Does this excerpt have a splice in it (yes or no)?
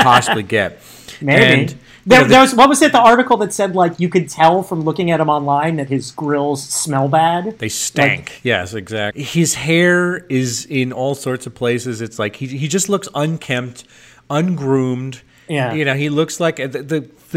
yes